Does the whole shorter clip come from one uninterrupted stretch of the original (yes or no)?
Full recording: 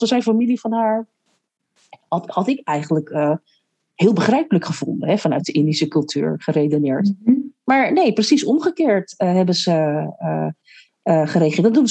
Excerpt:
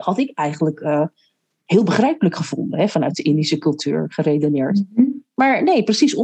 yes